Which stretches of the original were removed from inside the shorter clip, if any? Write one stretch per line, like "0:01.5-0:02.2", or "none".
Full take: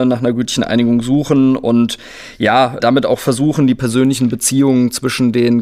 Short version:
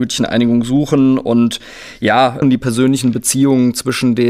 0:02.8-0:03.6